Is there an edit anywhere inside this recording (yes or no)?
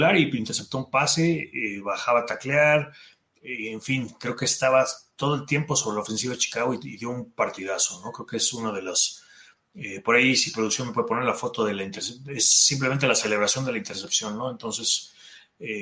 no